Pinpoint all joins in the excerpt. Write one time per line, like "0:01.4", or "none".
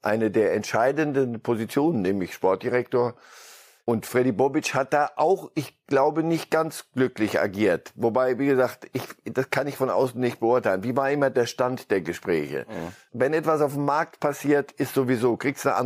none